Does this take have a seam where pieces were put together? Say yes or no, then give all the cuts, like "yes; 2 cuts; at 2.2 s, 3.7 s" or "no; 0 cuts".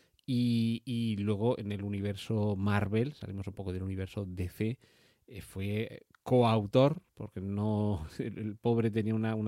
no; 0 cuts